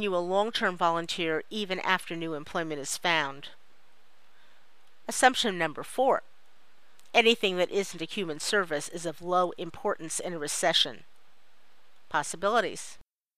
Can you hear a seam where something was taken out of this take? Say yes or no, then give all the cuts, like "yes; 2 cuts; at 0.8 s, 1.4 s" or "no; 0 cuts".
no; 0 cuts